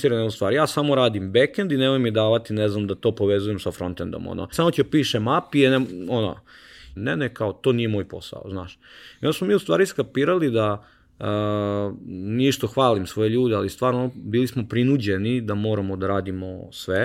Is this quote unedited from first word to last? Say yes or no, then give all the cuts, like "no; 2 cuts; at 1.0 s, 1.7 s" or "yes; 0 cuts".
no; 2 cuts; at 4.5 s, 7.0 s